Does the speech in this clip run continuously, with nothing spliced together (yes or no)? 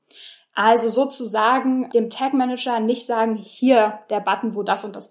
no